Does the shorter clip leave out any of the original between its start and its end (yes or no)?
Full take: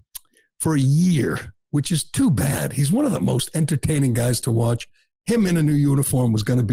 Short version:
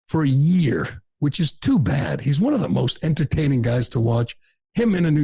no